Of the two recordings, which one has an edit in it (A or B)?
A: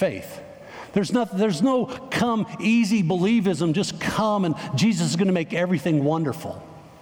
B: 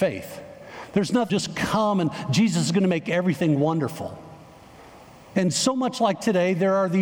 B